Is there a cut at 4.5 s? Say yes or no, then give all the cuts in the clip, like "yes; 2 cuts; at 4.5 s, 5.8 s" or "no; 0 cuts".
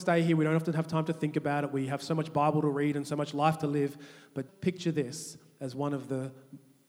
yes; 1 cut; at 4.5 s